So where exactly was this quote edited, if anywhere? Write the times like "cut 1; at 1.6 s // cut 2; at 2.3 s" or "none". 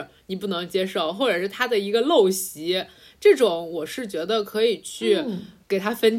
none